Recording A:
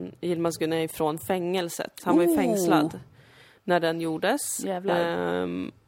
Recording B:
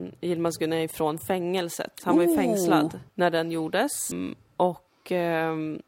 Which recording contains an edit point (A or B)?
B